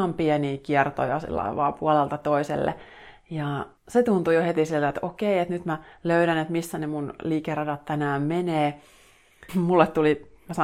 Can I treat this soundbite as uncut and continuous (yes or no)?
no